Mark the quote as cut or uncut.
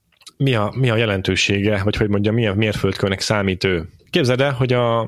cut